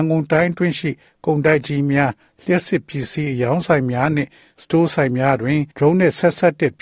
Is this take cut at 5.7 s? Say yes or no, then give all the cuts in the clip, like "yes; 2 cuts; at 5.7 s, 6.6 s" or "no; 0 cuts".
yes; 1 cut; at 5.7 s